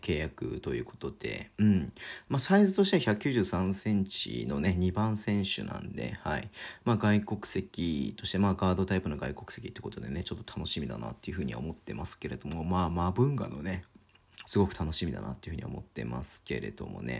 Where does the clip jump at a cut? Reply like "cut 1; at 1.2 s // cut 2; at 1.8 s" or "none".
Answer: cut 1; at 14.4 s